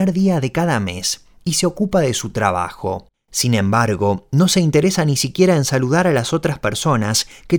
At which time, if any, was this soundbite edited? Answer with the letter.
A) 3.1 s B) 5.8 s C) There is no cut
C